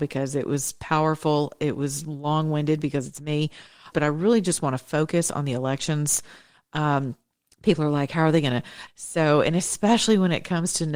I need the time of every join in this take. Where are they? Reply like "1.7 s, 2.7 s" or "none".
3.9 s, 8.9 s